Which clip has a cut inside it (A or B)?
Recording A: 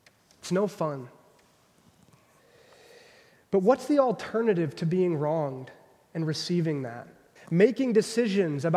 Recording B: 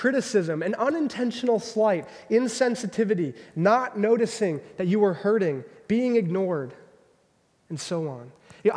A